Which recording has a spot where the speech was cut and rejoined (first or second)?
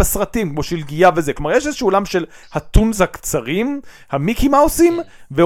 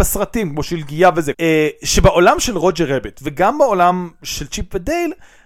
second